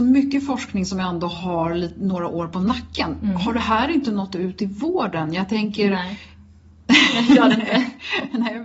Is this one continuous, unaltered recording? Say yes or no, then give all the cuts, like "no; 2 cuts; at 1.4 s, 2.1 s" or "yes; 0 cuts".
yes; 0 cuts